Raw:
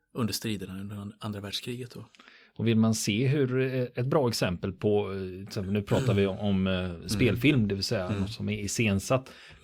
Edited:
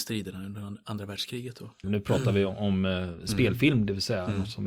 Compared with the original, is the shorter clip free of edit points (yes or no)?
no